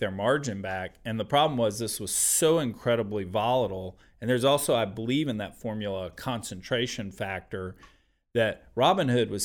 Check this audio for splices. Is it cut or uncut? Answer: uncut